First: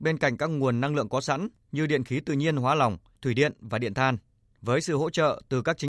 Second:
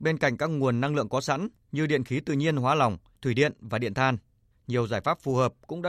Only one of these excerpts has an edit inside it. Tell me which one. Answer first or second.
second